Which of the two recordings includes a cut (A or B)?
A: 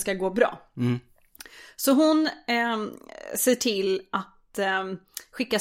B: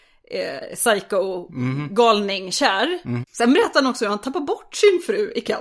B